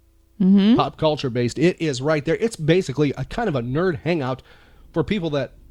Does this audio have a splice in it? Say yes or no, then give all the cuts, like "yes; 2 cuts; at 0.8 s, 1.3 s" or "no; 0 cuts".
no; 0 cuts